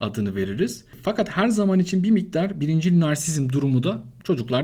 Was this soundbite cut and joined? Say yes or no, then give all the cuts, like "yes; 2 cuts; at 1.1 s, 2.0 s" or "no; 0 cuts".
no; 0 cuts